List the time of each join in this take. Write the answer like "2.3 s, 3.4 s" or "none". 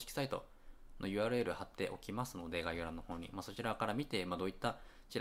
none